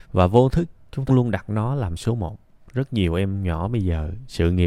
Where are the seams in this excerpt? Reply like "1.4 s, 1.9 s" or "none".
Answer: 1.1 s